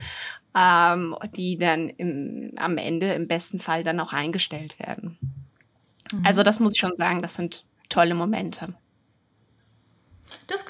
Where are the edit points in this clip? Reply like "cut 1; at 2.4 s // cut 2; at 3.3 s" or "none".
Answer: none